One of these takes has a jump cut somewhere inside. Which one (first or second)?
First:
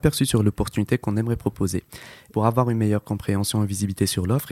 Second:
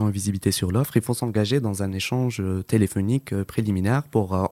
first